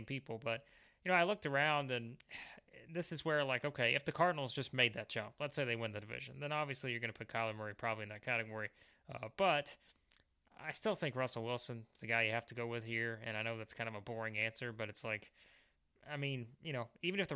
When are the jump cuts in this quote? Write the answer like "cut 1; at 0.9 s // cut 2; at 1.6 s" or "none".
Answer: none